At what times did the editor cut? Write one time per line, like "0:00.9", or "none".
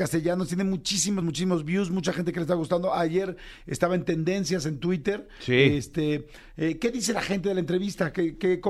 none